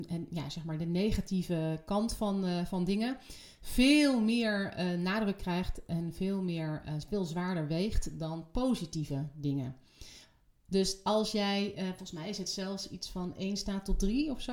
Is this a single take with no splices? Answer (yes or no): yes